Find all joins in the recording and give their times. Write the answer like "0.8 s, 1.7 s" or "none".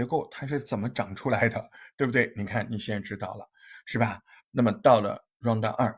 4.5 s